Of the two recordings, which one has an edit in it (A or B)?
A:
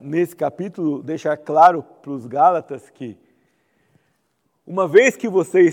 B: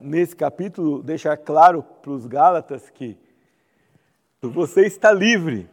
B